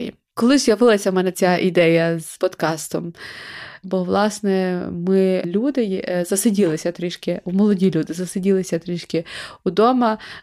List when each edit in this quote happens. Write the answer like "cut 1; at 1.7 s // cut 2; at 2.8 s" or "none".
cut 1; at 3.8 s

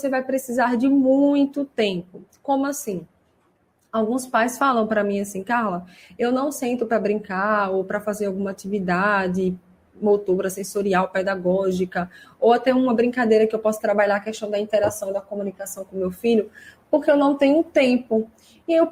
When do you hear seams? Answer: none

